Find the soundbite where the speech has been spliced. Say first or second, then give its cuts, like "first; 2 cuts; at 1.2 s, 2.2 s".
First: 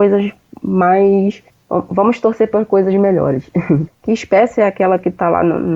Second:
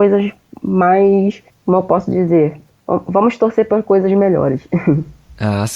first; 2 cuts; at 1.6 s, 3.9 s